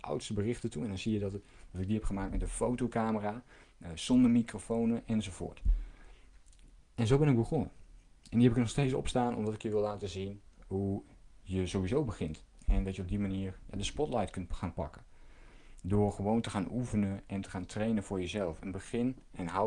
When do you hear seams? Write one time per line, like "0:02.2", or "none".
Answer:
0:06.8